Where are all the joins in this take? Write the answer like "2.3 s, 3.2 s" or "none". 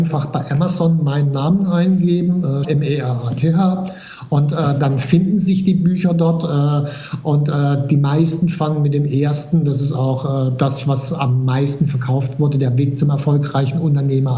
2.6 s